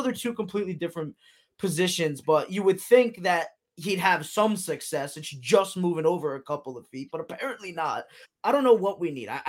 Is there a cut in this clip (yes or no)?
yes